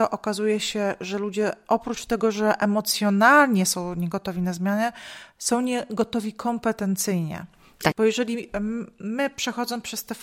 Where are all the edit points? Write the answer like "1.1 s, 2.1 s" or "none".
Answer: 7.9 s

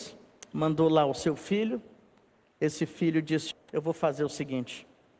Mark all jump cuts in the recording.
3.5 s

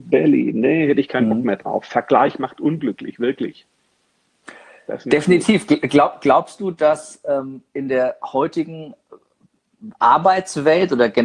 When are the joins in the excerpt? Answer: none

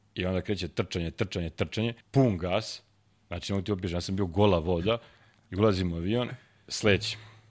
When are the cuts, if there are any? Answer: 2.0 s

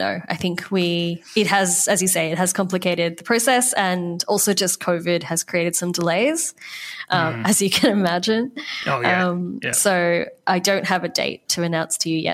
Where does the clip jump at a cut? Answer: none

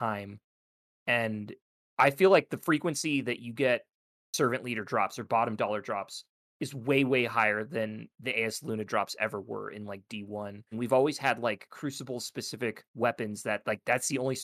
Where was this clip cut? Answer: 10.7 s, 12.9 s

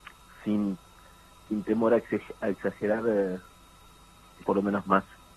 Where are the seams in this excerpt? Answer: 4.4 s

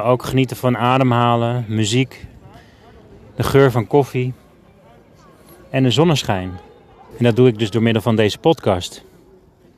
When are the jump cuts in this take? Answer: 7.1 s

